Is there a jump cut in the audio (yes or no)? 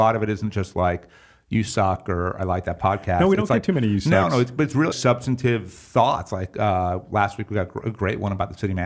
yes